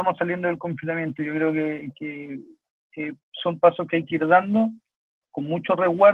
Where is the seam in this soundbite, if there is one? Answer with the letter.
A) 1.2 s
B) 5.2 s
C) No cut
C